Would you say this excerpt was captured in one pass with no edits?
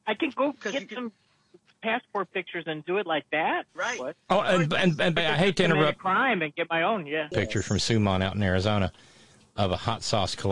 no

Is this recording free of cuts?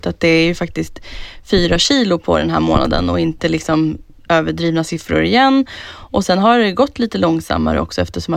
yes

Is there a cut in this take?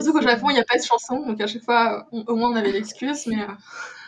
no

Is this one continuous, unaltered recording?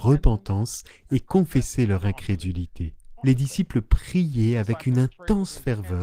no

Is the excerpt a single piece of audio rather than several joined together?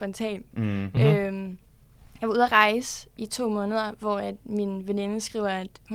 yes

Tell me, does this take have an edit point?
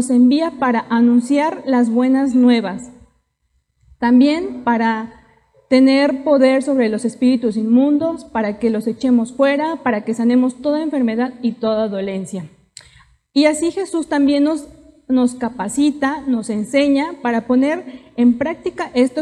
no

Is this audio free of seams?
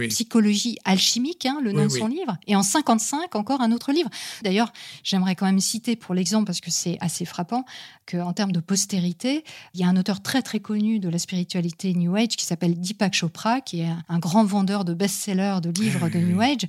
no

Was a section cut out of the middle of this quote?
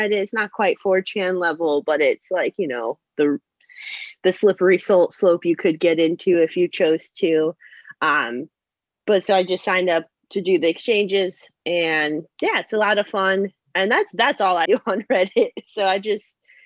yes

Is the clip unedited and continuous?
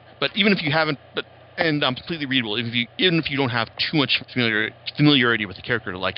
no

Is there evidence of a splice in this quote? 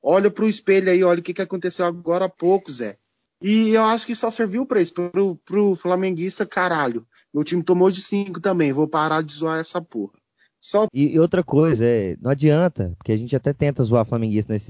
yes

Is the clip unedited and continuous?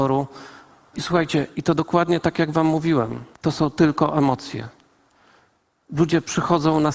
no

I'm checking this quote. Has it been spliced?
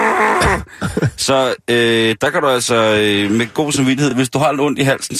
no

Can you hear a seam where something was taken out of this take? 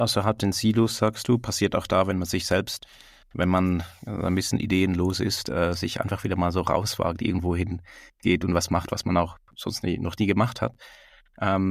no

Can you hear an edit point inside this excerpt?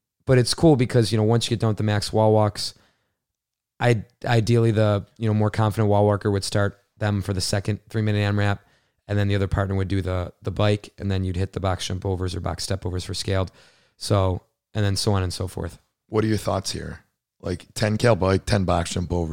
no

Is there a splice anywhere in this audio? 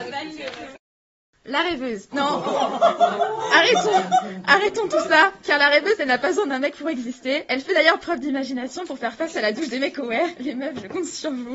yes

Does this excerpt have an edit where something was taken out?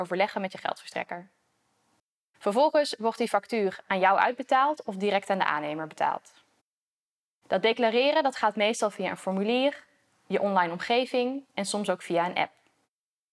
no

